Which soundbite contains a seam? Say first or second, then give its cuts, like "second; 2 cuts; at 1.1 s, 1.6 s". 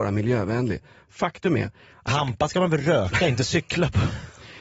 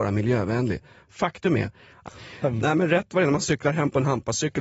second; 1 cut; at 2.1 s